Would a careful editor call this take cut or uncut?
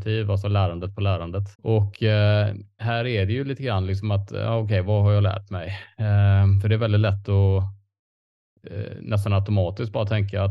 cut